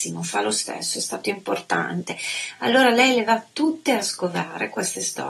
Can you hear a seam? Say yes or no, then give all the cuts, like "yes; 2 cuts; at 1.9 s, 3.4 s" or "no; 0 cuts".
no; 0 cuts